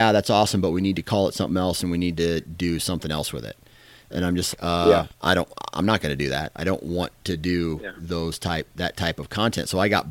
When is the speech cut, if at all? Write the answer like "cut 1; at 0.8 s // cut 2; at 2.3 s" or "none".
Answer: cut 1; at 4.5 s